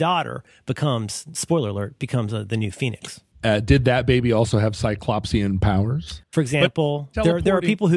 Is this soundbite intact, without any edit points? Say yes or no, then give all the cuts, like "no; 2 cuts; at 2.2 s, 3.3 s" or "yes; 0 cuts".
no; 2 cuts; at 3.3 s, 6.2 s